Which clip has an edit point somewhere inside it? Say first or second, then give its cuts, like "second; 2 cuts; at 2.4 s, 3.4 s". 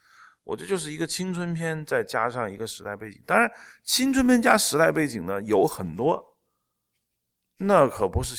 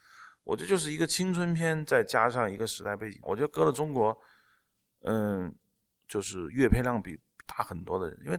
second; 2 cuts; at 3.2 s, 5.9 s